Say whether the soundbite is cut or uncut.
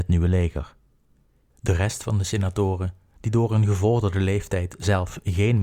cut